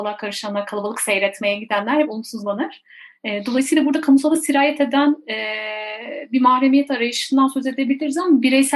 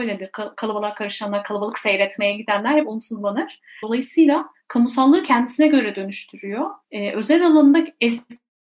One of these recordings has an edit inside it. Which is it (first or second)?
second